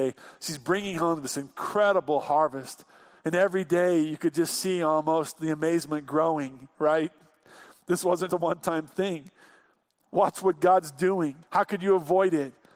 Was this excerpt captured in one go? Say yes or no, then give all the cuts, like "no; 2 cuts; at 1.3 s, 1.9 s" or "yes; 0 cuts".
no; 2 cuts; at 8.3 s, 11.4 s